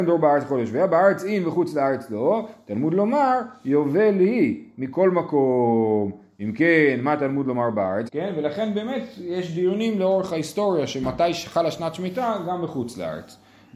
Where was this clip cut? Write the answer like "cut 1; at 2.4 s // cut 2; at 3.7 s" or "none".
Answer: cut 1; at 8.1 s